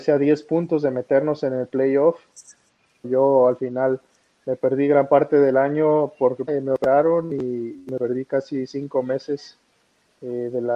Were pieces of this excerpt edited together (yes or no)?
yes